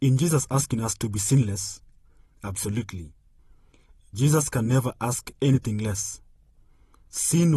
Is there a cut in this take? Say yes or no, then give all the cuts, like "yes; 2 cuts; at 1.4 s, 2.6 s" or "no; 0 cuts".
no; 0 cuts